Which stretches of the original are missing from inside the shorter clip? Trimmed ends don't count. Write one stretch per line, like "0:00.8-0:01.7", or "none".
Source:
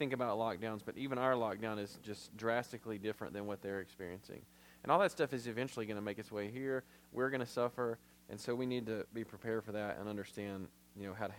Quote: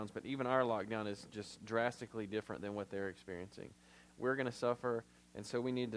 0:04.8-0:07.0